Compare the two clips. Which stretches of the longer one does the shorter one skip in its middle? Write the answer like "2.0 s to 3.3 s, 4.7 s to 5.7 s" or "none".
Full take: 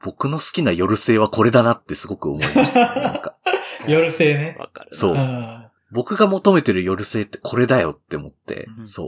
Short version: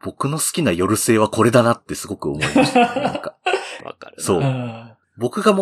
3.8 s to 4.5 s